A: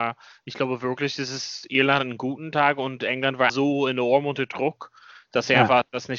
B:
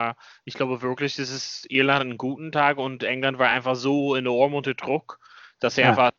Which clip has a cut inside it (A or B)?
A